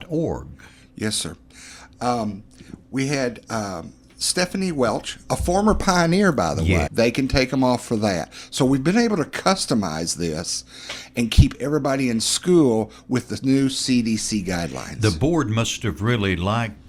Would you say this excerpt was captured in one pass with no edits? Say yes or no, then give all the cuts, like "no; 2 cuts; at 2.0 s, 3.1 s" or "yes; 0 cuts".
no; 1 cut; at 6.9 s